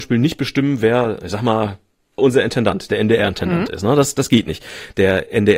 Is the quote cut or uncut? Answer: cut